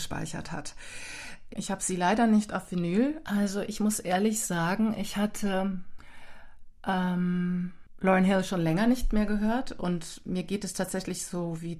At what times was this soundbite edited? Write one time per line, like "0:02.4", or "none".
0:01.5
0:03.2